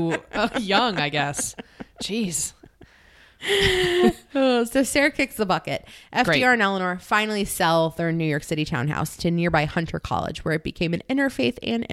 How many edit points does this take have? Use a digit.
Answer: 0